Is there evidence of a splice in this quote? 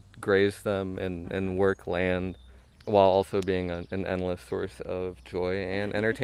no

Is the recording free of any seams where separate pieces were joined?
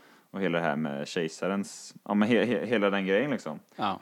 yes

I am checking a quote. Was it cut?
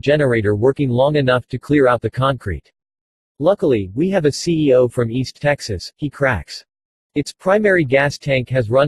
yes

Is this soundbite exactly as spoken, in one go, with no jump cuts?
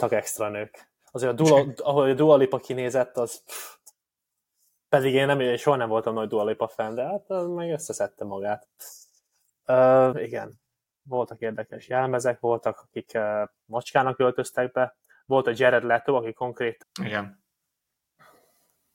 no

